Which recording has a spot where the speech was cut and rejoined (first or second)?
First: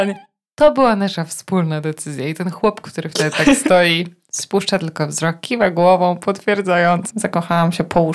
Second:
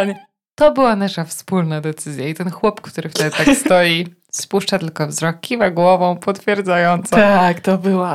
first